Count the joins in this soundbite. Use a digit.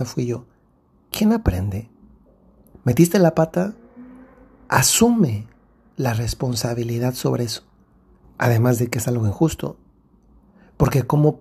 2